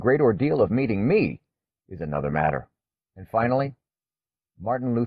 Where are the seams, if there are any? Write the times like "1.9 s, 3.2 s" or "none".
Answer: 3.0 s